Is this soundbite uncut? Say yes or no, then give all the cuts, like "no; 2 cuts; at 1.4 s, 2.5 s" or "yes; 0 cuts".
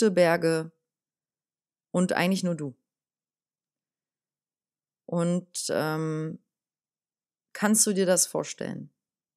yes; 0 cuts